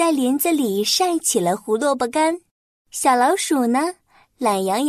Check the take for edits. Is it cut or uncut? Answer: uncut